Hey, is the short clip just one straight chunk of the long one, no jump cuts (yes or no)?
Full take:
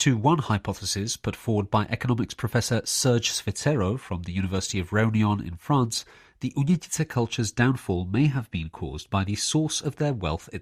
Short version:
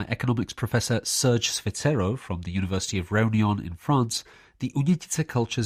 yes